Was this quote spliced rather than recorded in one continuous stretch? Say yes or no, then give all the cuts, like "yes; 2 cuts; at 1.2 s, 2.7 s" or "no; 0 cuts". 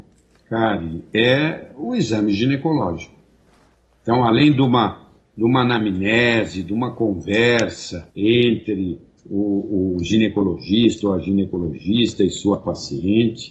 yes; 1 cut; at 8.1 s